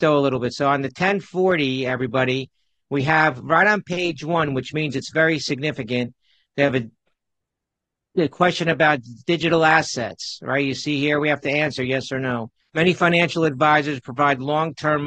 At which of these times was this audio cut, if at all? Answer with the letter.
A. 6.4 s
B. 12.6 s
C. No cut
B